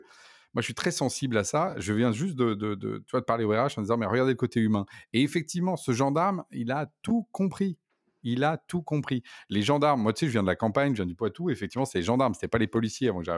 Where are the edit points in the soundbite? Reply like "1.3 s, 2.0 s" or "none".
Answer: none